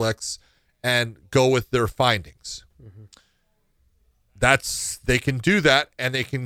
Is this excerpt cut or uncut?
uncut